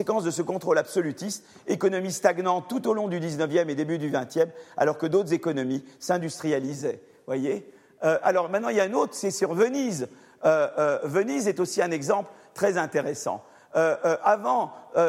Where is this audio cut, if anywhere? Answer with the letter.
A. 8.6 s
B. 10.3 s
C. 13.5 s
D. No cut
D